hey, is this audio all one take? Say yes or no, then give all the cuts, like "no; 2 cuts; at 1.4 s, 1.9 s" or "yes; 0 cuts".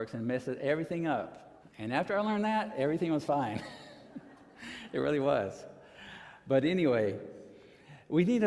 no; 1 cut; at 1.6 s